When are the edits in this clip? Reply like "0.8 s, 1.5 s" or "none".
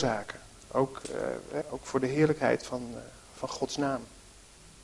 1.6 s